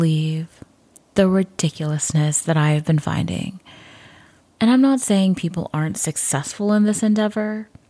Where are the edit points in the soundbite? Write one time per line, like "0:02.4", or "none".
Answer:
0:04.5